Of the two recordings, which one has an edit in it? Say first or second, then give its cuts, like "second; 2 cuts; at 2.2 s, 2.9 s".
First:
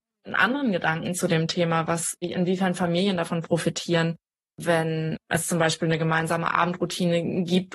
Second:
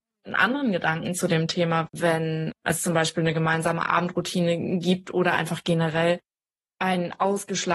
second; 1 cut; at 1.9 s